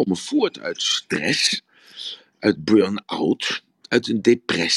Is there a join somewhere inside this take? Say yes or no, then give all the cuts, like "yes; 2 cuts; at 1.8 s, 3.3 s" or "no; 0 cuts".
no; 0 cuts